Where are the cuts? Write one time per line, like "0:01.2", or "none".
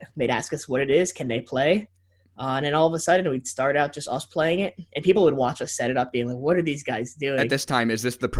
none